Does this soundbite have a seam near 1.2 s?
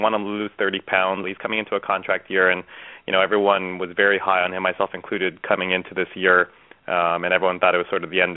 yes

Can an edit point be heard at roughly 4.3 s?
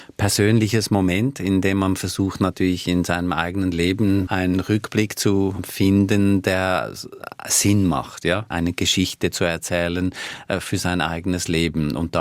yes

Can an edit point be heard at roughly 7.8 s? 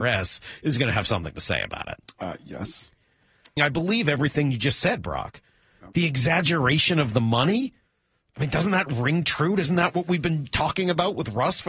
no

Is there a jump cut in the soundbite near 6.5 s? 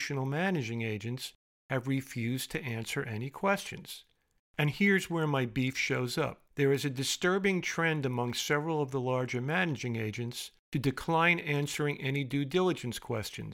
yes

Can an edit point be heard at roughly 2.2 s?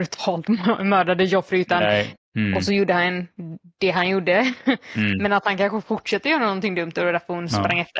yes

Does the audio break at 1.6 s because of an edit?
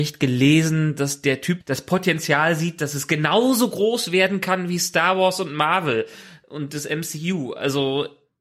yes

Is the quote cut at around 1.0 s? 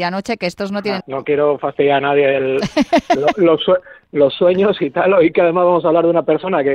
yes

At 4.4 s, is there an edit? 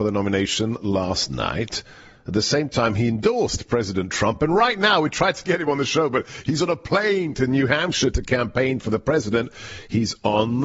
no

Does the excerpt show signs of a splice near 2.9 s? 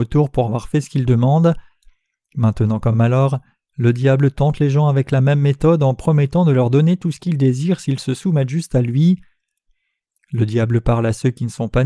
no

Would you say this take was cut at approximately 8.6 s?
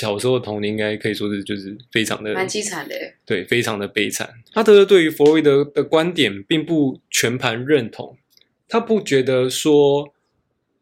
no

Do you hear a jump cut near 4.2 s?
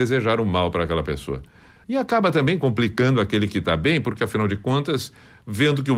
no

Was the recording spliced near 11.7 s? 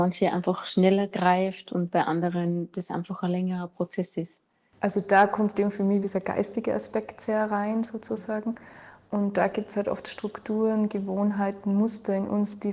no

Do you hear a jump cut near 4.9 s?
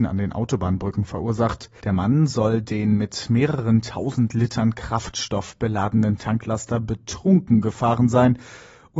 no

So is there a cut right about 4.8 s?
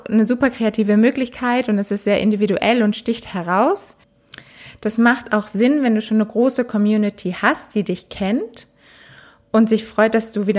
no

